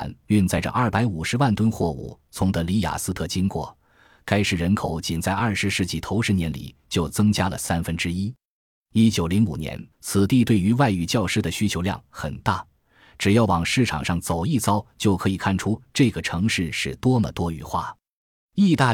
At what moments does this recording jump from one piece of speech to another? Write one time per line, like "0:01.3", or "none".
0:09.9